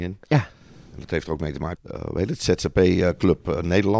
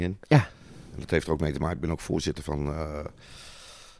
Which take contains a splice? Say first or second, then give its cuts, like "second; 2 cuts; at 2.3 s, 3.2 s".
first; 1 cut; at 1.8 s